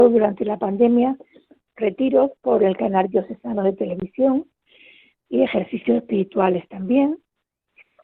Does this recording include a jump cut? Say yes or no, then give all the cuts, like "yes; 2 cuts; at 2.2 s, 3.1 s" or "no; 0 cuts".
no; 0 cuts